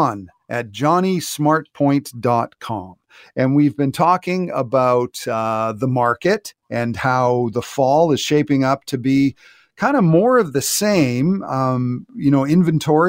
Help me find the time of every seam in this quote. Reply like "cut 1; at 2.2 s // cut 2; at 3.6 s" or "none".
none